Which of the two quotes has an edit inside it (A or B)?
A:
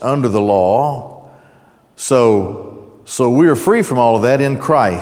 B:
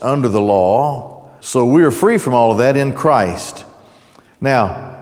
B